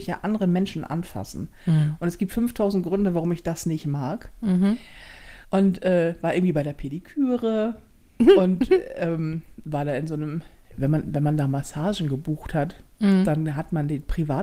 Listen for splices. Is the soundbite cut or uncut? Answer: cut